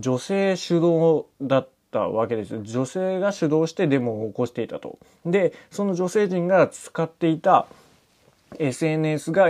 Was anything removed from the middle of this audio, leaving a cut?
no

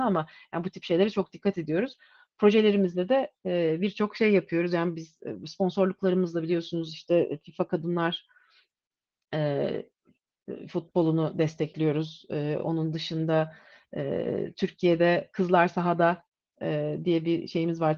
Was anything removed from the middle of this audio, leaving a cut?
no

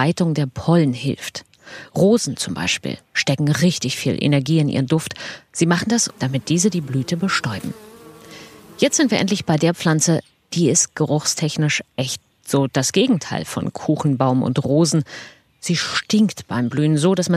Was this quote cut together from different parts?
yes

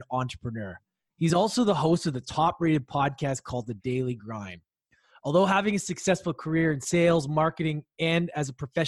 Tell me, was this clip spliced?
no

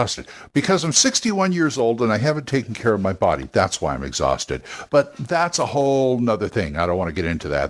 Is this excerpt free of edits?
yes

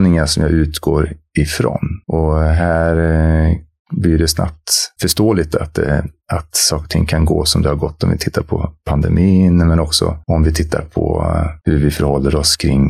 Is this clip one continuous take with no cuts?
yes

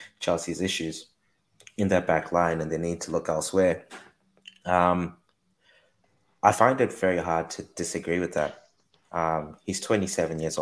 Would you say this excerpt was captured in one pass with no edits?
yes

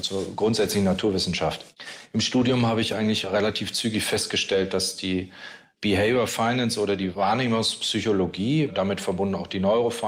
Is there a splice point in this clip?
no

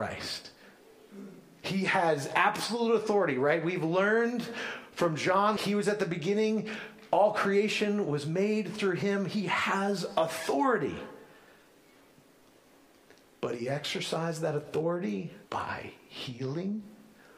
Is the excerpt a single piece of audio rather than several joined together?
no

